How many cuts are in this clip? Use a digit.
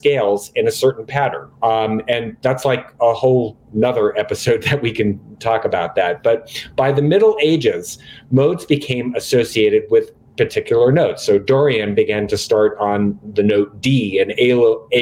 1